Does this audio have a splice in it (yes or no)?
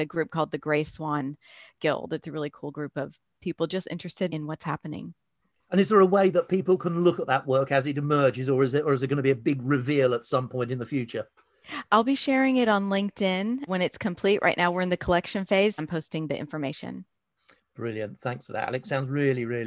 yes